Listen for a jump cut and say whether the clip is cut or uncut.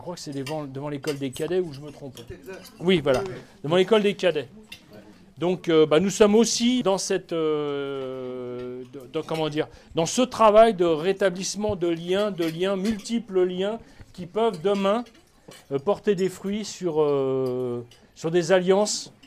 cut